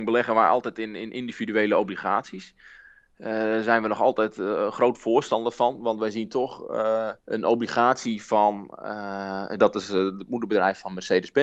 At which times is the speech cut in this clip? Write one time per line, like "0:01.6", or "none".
0:07.2
0:09.6

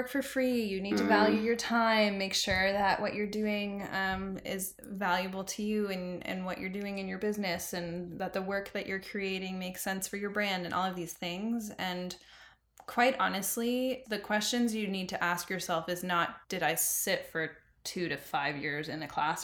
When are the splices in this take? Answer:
0:14.0
0:16.4

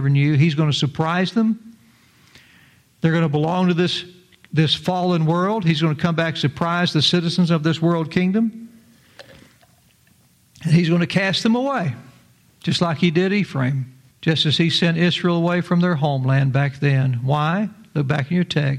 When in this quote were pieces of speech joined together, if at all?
0:14.1

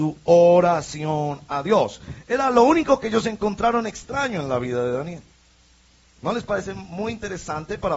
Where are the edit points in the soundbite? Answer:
none

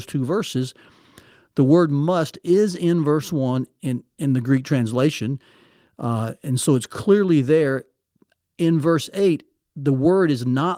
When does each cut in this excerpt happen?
none

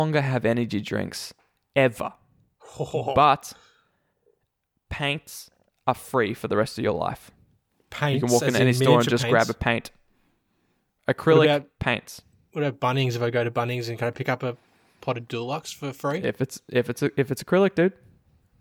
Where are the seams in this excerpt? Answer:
none

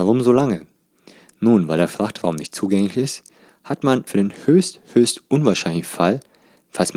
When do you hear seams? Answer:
0:04.1

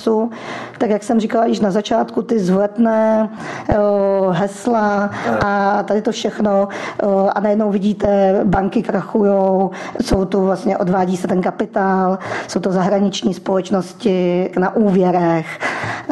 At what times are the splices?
0:10.0
0:14.5

